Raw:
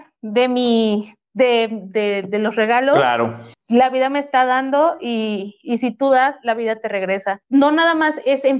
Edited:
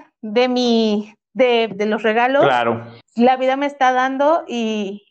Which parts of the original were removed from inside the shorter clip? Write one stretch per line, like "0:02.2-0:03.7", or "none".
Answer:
0:01.7-0:02.2